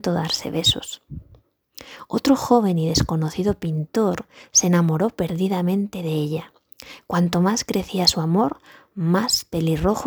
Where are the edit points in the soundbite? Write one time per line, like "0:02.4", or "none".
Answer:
none